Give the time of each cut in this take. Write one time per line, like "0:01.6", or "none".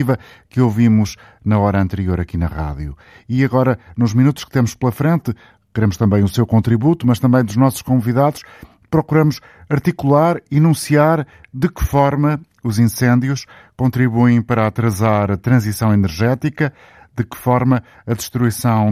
none